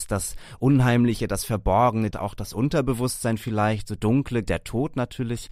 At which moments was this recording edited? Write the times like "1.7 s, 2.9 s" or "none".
2.1 s, 4.4 s